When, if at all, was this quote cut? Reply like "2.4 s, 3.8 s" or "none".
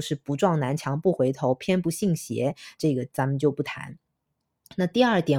2.8 s